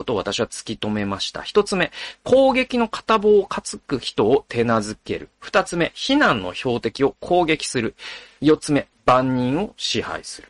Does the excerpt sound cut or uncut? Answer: cut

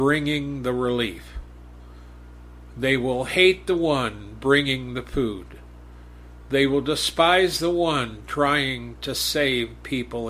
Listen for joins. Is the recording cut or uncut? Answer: uncut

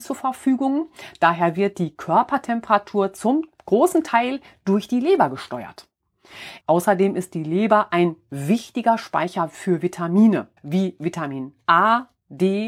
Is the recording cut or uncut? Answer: cut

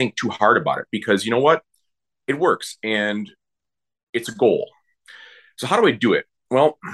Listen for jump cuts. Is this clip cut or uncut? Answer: cut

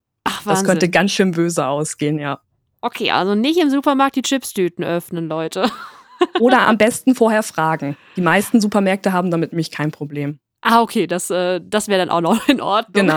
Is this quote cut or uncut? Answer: uncut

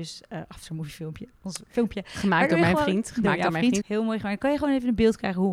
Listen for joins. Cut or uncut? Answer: cut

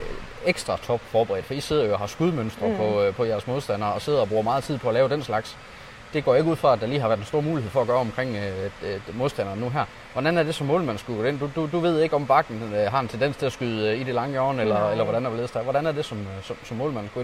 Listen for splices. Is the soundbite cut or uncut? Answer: uncut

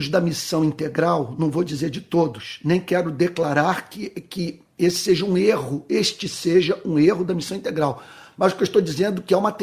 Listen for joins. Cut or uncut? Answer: uncut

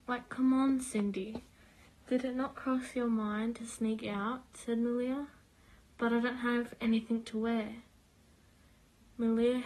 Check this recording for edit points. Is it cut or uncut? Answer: uncut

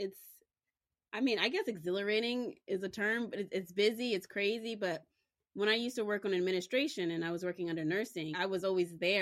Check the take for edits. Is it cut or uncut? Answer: cut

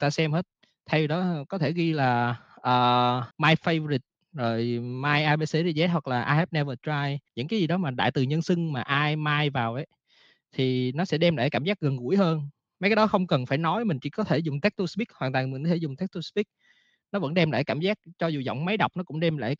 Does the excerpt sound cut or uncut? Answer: cut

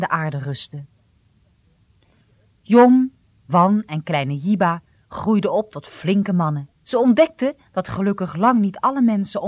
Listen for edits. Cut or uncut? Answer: cut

